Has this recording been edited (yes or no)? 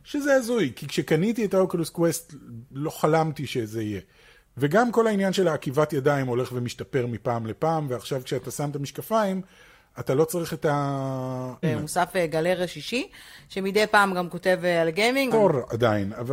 yes